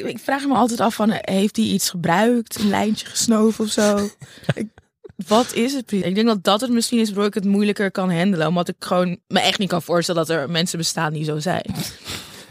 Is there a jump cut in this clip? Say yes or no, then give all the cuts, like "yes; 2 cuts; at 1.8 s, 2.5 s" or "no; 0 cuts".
yes; 2 cuts; at 6.0 s, 9.2 s